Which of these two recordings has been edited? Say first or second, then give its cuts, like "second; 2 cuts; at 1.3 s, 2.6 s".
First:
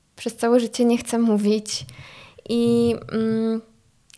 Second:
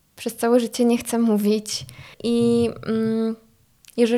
second; 1 cut; at 2.1 s